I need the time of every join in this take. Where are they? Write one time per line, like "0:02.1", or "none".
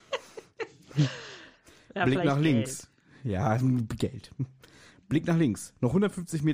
none